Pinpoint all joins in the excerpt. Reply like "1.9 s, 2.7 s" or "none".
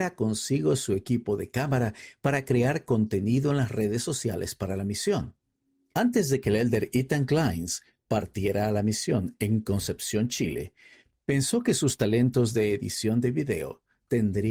5.9 s